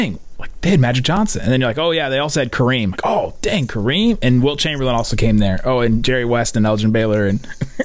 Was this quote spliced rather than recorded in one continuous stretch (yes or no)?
no